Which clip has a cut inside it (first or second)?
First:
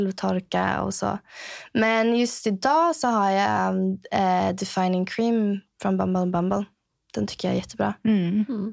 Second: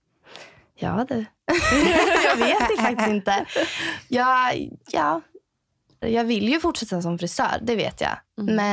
second